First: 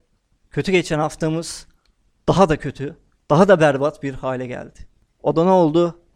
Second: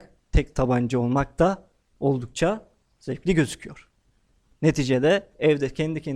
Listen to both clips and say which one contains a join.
first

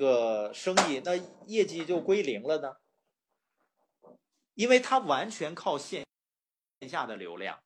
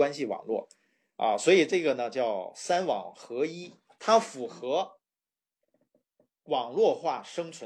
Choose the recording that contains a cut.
second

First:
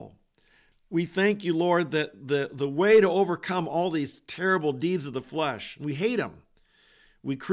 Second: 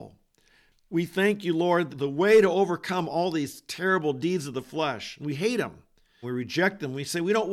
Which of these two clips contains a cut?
second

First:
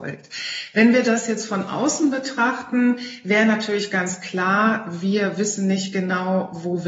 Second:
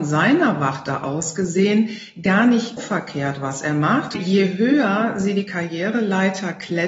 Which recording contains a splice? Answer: second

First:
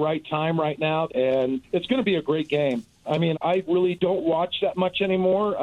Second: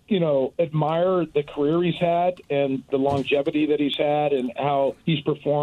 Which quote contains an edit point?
first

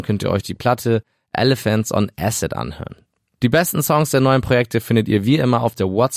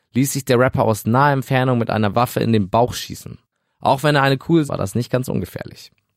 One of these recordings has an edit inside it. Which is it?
second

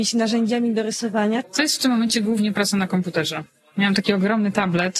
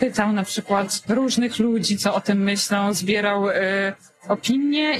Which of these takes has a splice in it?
first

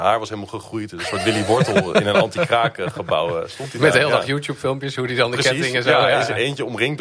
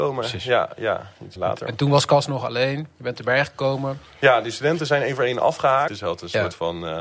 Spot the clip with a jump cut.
second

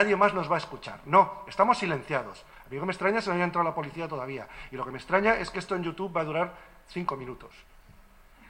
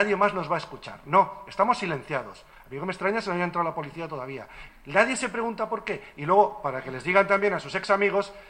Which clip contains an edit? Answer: second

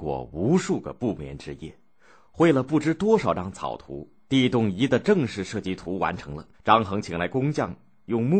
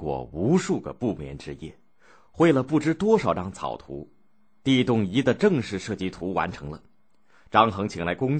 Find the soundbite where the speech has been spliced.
first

